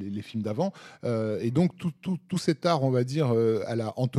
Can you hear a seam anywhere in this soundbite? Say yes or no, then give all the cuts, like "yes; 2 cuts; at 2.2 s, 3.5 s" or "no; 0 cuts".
yes; 1 cut; at 2.0 s